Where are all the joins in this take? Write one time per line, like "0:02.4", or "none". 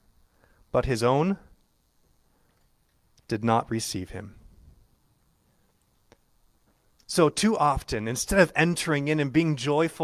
none